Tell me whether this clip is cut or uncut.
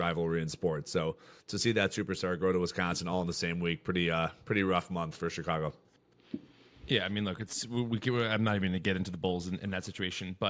uncut